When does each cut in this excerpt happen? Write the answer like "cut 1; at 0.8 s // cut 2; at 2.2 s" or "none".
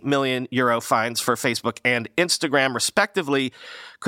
none